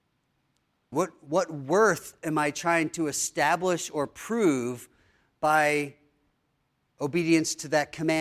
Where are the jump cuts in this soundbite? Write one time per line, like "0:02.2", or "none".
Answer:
0:00.9

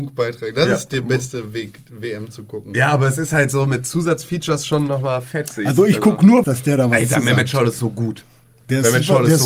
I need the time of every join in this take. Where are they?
0:06.4

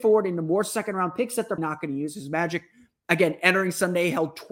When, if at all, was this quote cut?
0:01.6

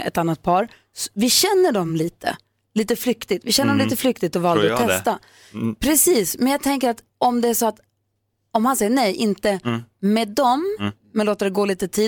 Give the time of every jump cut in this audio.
none

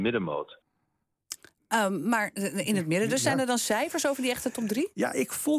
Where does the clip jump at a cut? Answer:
none

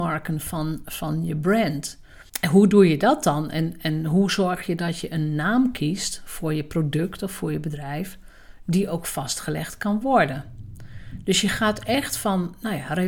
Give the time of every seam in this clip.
0:02.3

